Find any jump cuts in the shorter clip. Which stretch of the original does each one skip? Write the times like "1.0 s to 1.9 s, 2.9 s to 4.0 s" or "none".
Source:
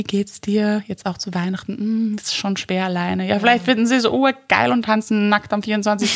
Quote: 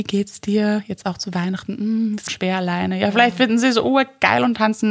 2.3 s to 2.6 s